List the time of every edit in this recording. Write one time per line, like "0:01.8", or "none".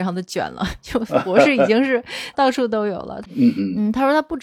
0:03.2